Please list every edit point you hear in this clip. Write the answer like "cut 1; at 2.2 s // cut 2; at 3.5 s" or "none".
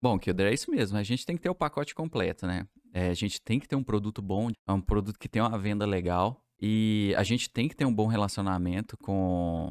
cut 1; at 4.5 s